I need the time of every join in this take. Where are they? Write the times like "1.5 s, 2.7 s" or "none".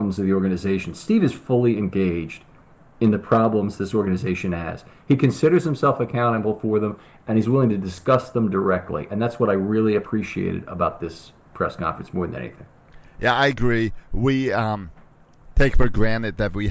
none